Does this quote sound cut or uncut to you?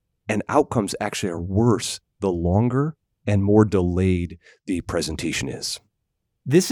uncut